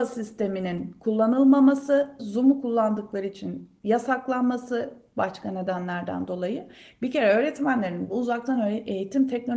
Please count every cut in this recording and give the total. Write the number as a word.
one